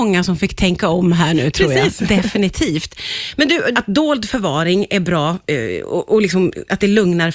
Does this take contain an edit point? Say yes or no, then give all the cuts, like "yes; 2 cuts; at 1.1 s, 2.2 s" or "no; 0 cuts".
yes; 1 cut; at 3.7 s